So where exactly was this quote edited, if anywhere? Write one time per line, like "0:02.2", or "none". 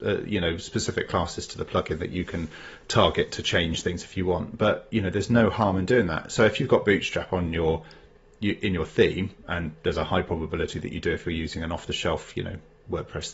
none